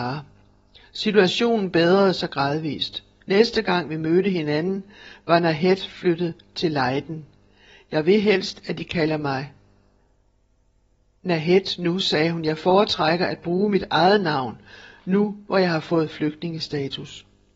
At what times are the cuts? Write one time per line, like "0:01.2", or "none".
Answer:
none